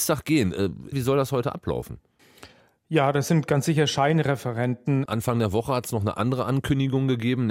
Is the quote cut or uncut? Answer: cut